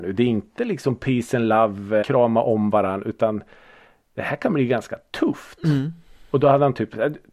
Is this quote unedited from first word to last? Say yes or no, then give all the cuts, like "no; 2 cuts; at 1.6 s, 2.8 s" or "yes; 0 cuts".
no; 1 cut; at 2.0 s